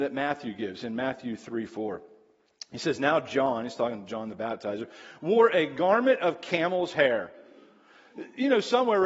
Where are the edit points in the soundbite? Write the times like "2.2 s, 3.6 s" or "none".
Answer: none

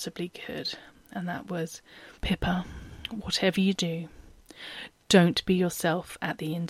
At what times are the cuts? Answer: 2.2 s

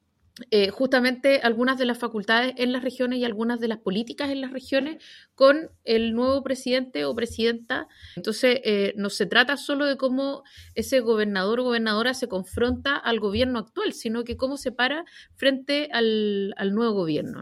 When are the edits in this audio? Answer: 8.2 s

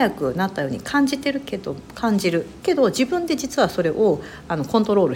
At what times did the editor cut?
2.6 s

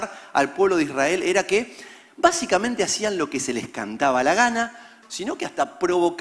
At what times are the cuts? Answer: 5.0 s

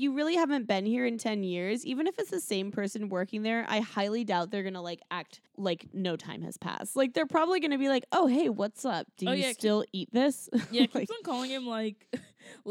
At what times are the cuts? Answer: 5.5 s

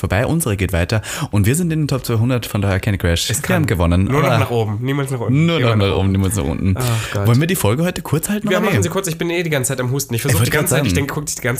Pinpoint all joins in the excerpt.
none

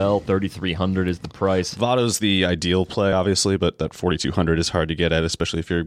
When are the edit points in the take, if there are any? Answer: none

